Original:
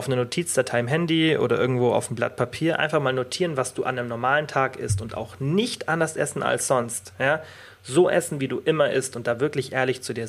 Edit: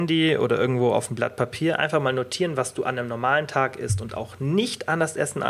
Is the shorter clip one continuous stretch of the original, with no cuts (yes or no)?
yes